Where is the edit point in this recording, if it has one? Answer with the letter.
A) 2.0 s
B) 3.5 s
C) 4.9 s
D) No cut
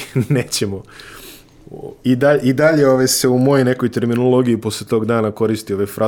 A